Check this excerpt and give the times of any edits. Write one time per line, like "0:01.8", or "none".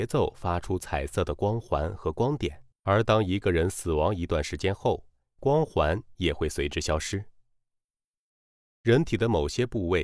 0:02.7